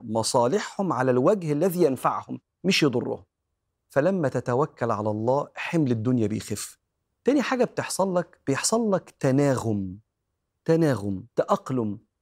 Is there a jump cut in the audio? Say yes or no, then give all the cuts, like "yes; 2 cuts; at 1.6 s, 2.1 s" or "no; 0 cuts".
yes; 1 cut; at 11.3 s